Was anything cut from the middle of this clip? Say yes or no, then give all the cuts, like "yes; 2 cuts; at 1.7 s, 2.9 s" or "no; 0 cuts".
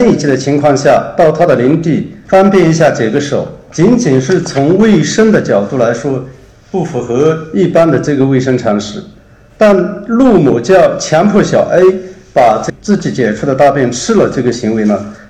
no; 0 cuts